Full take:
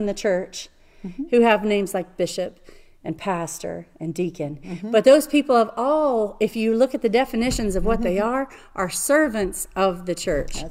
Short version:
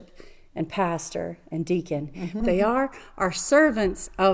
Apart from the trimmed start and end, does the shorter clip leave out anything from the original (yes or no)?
yes